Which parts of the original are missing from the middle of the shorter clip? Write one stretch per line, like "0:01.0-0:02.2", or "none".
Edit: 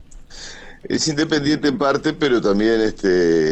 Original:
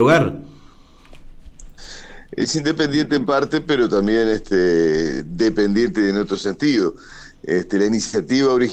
none